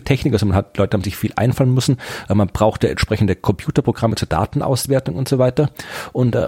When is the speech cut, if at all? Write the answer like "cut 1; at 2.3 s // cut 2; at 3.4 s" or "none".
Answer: none